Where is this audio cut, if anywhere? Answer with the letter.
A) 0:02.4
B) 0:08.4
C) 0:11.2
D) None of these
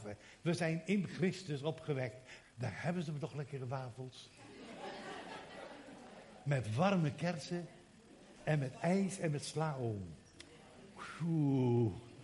A